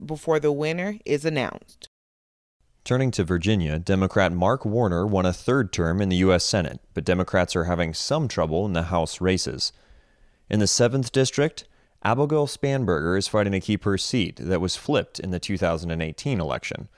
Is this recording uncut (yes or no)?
yes